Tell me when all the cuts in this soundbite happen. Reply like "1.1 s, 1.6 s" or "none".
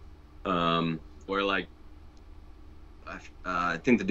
1.3 s